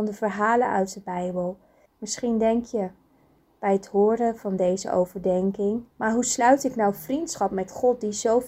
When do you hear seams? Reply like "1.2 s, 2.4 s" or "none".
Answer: 1.9 s, 5.9 s